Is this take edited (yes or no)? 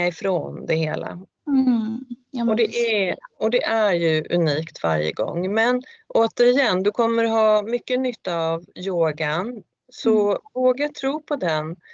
yes